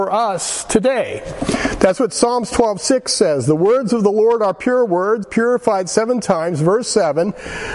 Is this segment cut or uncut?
cut